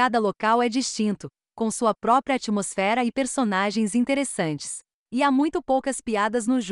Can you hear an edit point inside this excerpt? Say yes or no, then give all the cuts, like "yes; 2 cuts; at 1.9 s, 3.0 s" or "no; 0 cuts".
yes; 1 cut; at 5.0 s